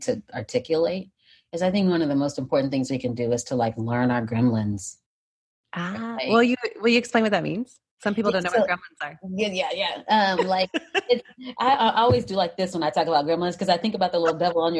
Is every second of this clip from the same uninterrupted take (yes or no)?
yes